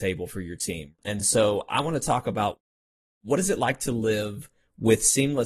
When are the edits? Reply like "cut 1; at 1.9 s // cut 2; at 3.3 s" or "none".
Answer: none